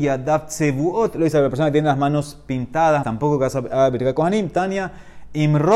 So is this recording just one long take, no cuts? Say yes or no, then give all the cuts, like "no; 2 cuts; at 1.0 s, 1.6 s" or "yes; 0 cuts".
no; 1 cut; at 3.0 s